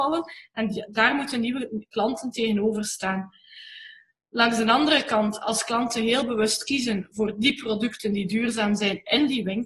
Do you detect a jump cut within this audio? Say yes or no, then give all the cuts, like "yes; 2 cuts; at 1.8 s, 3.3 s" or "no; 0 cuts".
no; 0 cuts